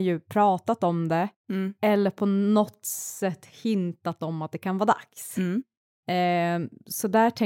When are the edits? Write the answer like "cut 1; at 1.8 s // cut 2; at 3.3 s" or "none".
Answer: none